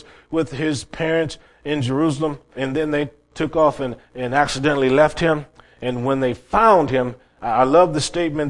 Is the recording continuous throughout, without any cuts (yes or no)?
no